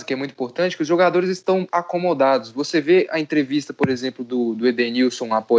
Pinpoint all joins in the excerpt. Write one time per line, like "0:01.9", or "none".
0:01.7